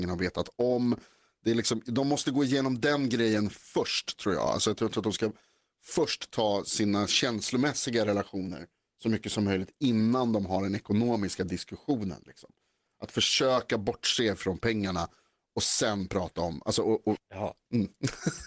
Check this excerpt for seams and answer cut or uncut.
cut